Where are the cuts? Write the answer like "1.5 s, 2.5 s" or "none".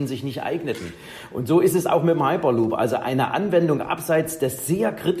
none